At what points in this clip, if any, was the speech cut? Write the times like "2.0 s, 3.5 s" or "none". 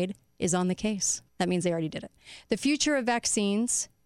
1.3 s